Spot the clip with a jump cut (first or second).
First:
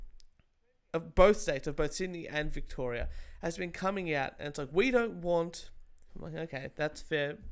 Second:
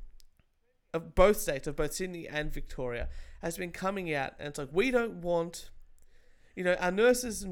first